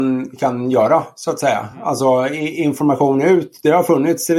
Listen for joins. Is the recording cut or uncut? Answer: uncut